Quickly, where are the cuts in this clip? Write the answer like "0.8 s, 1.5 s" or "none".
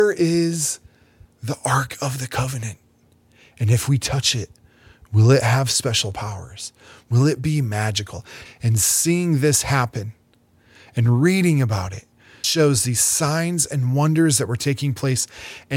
8.5 s, 12.4 s